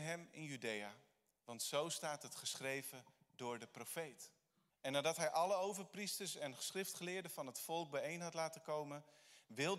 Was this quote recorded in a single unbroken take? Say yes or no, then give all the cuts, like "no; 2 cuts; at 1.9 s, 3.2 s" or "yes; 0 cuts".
no; 1 cut; at 4.7 s